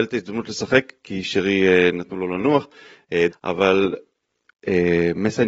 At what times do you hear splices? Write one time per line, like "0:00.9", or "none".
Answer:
0:03.3